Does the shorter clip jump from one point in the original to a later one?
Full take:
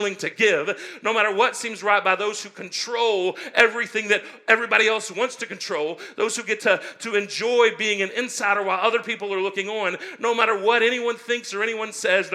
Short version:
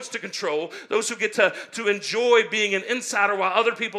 no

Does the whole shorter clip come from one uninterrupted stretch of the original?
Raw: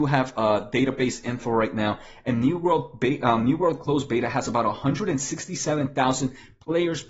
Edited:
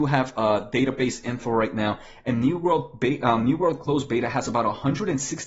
yes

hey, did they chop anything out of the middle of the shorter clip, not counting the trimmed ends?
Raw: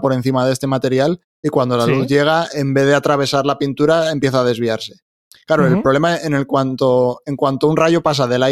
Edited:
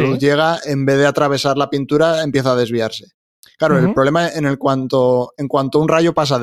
no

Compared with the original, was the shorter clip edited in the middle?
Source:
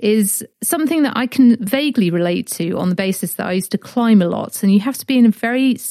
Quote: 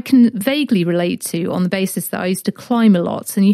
no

